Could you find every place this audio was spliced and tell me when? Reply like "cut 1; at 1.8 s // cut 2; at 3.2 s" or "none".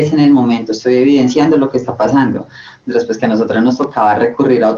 none